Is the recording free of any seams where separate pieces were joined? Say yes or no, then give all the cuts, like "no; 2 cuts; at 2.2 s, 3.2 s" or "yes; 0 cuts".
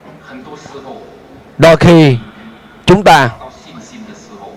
yes; 0 cuts